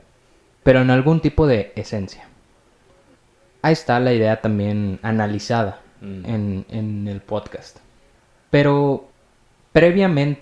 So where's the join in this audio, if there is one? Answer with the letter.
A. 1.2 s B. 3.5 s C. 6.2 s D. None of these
D